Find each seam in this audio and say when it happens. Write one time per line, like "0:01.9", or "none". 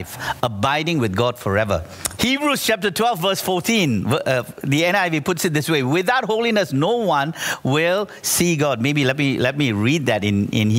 0:02.2